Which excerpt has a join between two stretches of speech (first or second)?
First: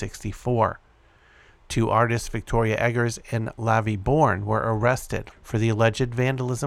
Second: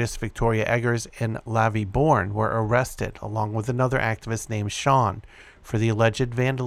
first